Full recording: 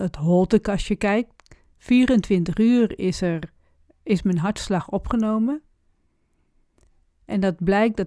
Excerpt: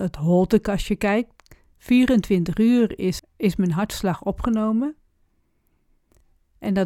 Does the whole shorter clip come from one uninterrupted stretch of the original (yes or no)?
no